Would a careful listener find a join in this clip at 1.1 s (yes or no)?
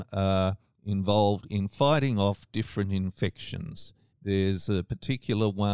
no